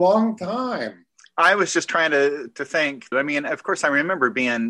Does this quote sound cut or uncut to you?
cut